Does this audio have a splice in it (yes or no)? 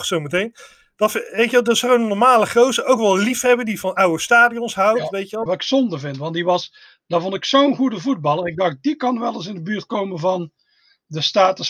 yes